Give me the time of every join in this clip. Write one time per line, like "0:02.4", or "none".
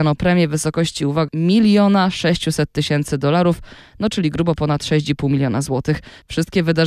0:01.3